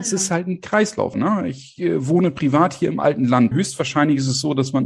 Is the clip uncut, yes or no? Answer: no